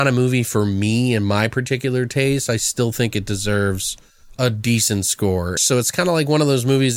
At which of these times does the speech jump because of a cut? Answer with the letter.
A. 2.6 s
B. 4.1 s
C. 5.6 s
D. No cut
C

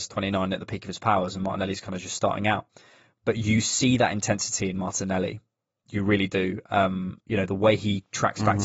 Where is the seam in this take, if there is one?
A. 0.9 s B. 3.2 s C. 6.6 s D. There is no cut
D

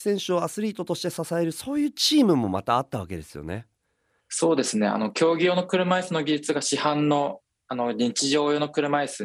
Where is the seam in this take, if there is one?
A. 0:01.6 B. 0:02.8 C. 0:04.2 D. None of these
C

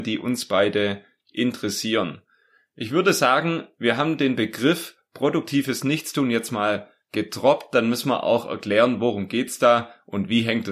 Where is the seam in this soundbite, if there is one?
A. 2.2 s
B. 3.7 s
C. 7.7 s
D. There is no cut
D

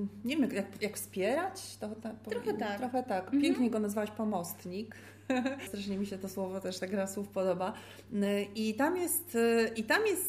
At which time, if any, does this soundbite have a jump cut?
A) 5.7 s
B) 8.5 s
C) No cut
A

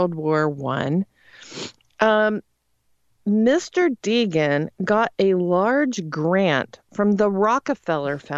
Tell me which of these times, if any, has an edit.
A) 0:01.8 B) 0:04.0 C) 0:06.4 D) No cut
D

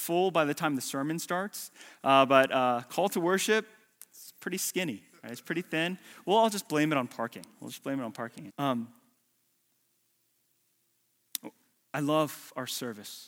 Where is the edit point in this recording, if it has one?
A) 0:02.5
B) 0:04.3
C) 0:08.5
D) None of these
C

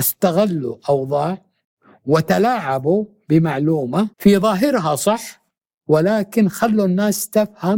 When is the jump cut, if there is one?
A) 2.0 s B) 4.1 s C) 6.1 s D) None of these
B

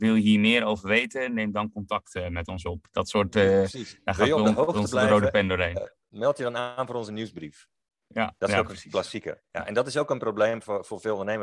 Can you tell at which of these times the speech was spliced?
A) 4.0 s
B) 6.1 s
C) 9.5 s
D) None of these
C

